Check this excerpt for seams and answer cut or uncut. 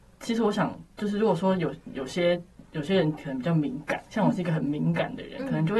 uncut